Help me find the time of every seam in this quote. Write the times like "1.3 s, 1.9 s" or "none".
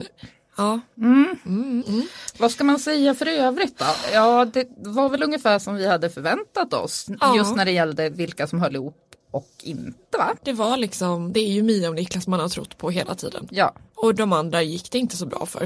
1.8 s, 10.4 s